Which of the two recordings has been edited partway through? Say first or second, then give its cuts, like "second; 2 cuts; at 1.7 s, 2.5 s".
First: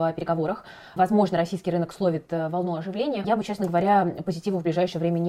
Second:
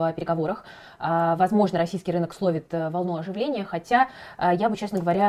first; 2 cuts; at 1.0 s, 3.2 s